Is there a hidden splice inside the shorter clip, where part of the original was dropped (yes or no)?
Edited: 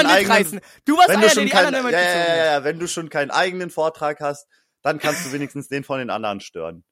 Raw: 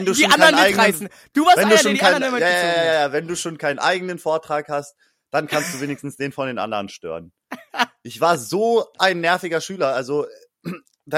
no